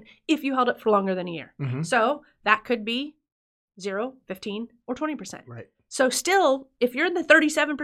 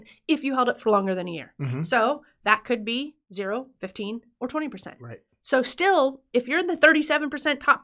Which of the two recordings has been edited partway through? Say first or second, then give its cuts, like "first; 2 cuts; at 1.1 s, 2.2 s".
second; 1 cut; at 3.2 s